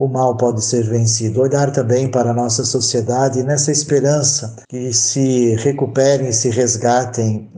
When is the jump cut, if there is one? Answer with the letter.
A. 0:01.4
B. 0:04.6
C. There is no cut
B